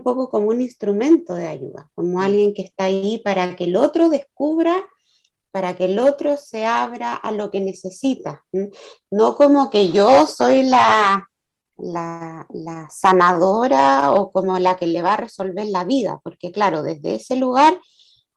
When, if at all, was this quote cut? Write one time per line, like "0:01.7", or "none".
none